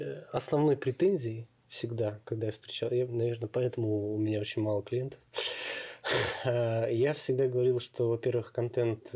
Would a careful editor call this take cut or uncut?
uncut